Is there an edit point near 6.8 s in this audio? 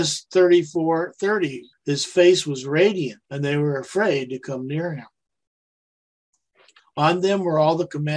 yes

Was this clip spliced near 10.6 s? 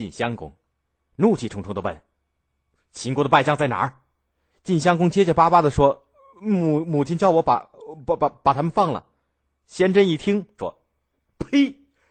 yes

